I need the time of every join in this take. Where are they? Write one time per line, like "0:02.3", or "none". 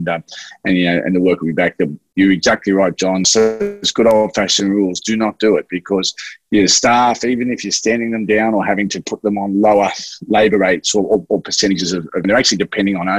0:03.2
0:12.2